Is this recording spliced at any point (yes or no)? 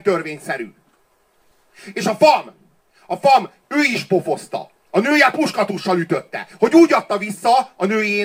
yes